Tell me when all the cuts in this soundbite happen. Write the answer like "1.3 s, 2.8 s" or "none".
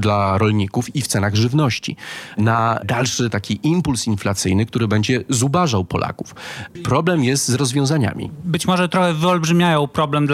6.8 s